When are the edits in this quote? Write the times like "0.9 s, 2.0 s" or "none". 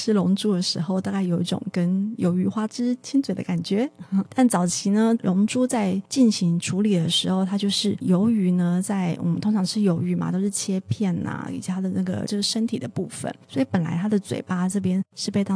11.5 s